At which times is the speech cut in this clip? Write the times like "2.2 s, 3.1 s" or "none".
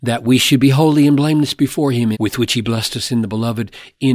2.1 s

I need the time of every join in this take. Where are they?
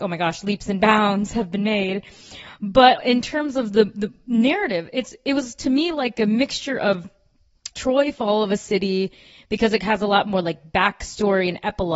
3.0 s, 7.7 s

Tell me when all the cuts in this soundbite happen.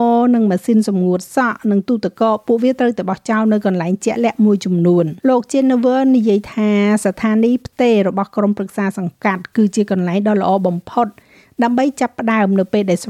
5.2 s

